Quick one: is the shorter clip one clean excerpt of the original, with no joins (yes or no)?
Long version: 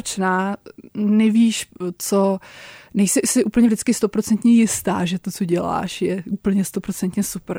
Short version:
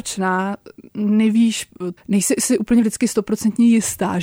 no